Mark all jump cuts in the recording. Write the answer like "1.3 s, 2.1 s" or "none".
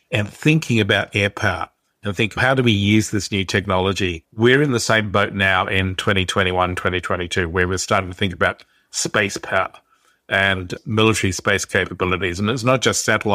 none